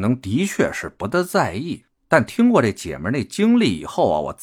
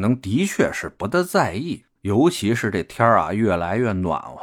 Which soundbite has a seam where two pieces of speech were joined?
second; 1 cut; at 2.0 s

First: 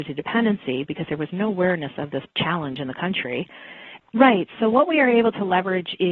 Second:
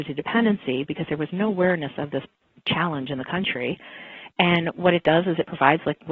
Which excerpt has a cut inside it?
first; 2 cuts; at 2.3 s, 4.0 s

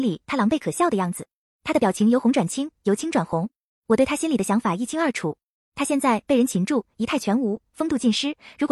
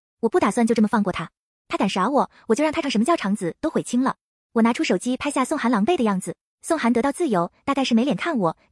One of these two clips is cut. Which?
second; 2 cuts; at 2.8 s, 6.5 s

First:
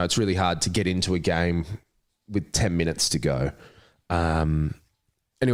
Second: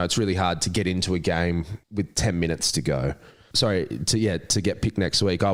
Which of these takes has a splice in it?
second; 2 cuts; at 1.8 s, 3.5 s

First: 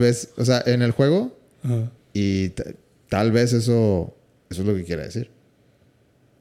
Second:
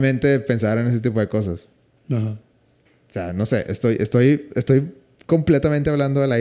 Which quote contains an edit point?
first; 1 cut; at 2.0 s

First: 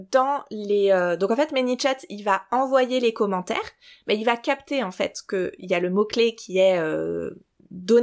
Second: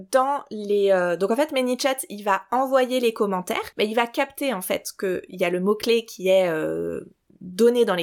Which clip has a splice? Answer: second; 1 cut; at 3.7 s

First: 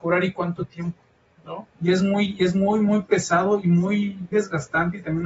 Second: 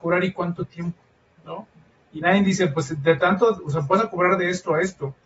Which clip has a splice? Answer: first; 2 cuts; at 1.8 s, 4.3 s

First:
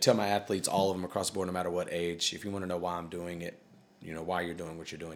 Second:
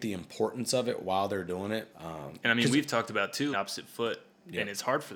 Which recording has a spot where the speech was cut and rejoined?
second; 2 cuts; at 1.9 s, 3.5 s

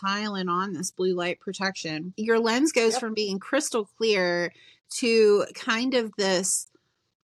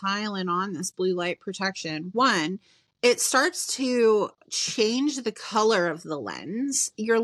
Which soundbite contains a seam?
first; 1 cut; at 2.1 s

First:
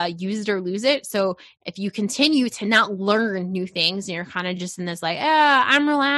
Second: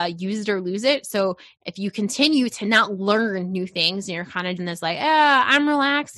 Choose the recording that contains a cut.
second; 1 cut; at 4.6 s

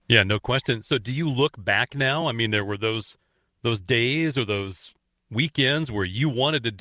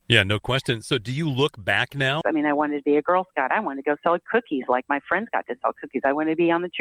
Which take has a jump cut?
second; 1 cut; at 2.2 s

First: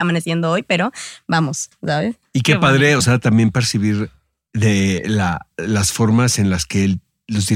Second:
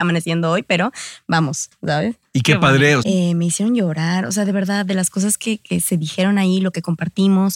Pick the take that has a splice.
second; 1 cut; at 3.0 s

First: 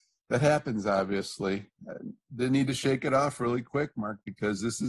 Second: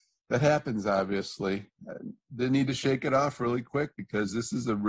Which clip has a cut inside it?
second; 1 cut; at 3.9 s

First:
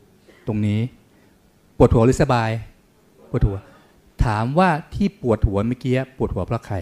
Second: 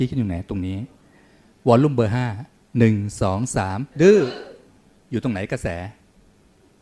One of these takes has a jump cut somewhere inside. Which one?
second; 1 cut; at 3.9 s

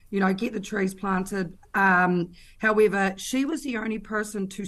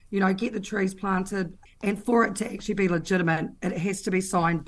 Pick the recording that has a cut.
second; 1 cut; at 1.7 s

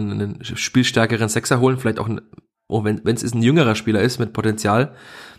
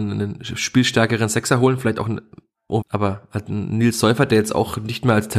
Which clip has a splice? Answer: second; 1 cut; at 2.8 s

